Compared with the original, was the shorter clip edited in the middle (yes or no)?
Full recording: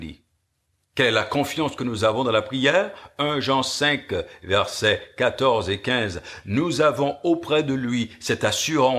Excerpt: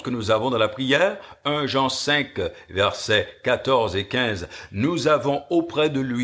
no